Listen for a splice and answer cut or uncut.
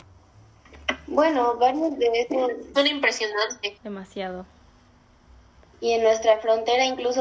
cut